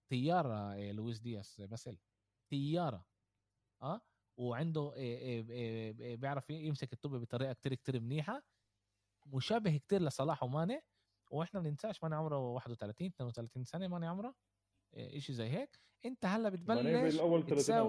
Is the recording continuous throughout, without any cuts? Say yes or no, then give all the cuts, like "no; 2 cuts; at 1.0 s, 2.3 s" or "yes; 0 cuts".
yes; 0 cuts